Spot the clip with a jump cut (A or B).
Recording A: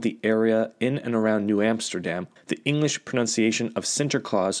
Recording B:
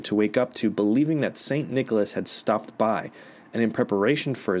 A